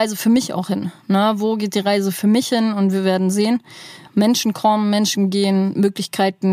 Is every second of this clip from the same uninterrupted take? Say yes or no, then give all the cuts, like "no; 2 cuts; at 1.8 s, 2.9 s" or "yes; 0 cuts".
no; 1 cut; at 4.1 s